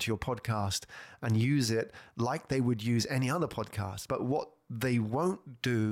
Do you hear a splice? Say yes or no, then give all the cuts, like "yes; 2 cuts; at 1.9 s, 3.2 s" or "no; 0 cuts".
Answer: no; 0 cuts